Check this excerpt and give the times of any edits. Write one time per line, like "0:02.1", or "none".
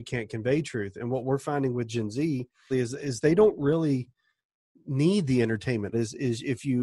0:02.7
0:05.9